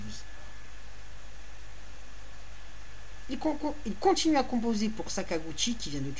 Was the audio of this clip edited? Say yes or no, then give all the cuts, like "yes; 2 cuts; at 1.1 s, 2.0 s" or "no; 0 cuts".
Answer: yes; 1 cut; at 3.3 s